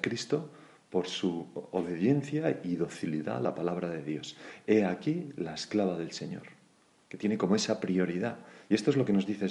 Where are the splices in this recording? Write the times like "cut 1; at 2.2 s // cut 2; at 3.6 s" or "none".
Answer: none

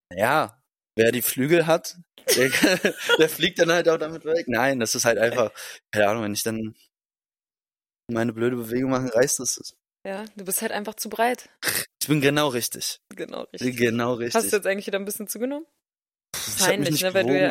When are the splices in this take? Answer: cut 1; at 11.9 s // cut 2; at 16.6 s

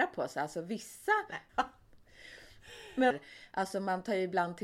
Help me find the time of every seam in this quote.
cut 1; at 1.5 s // cut 2; at 3.1 s

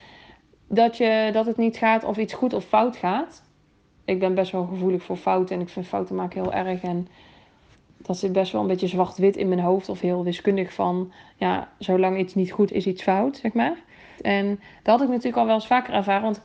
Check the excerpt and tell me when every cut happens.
cut 1; at 12.7 s // cut 2; at 14.2 s

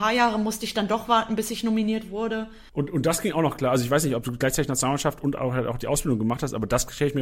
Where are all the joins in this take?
cut 1; at 2.7 s

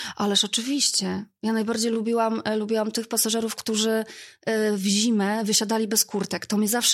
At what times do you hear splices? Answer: none

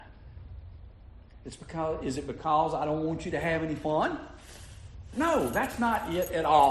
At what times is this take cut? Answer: none

